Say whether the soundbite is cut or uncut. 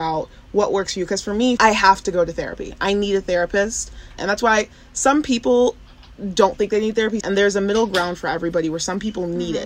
cut